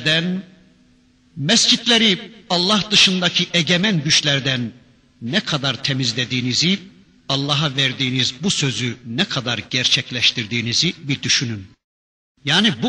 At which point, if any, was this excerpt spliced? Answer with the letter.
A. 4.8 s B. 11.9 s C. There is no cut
C